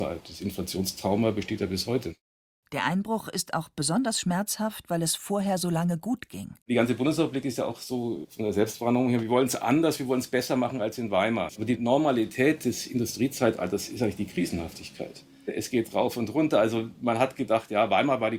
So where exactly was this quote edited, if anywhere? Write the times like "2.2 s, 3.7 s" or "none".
6.6 s, 11.5 s